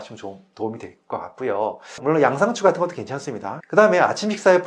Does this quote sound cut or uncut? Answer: cut